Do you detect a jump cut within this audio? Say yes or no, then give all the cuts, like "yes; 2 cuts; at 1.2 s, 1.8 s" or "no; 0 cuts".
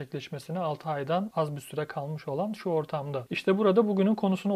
yes; 1 cut; at 3.3 s